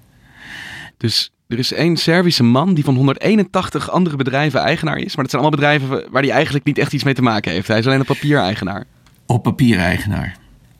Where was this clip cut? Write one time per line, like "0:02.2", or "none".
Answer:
0:00.9